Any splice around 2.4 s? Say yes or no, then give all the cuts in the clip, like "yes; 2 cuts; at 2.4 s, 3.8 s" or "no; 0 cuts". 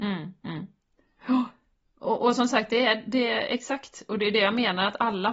no; 0 cuts